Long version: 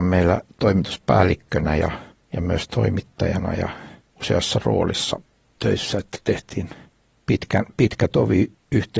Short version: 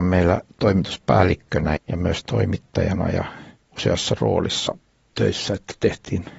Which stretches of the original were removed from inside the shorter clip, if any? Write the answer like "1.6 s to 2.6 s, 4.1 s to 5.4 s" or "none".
1.8 s to 2.2 s